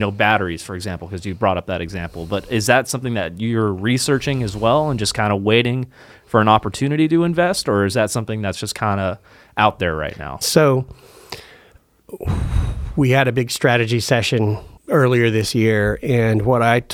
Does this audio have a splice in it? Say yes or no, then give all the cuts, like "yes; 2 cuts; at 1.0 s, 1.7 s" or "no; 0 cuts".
yes; 2 cuts; at 10.4 s, 14.8 s